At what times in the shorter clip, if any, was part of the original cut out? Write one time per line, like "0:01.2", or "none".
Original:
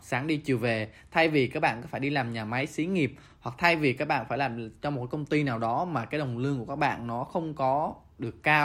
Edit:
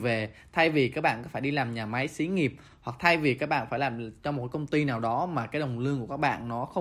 none